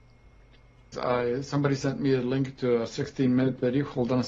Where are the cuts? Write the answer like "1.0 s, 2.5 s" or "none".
0.9 s